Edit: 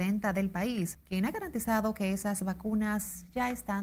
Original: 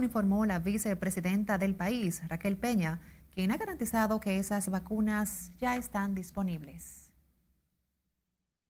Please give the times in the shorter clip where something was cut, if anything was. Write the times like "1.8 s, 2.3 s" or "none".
0.9 s